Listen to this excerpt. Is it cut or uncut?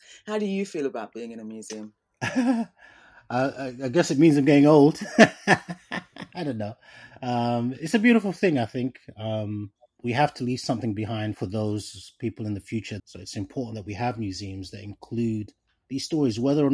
cut